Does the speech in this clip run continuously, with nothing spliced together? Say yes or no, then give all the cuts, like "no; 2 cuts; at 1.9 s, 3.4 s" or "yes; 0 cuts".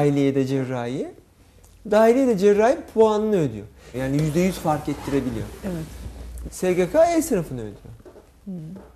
no; 2 cuts; at 3.9 s, 6.5 s